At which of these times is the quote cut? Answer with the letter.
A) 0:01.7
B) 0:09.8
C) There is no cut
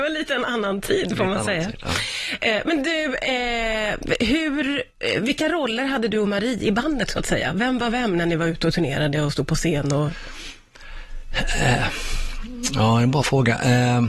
C